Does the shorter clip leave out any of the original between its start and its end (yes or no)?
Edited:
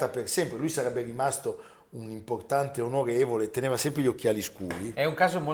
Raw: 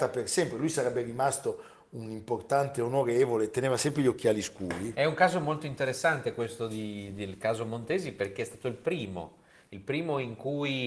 no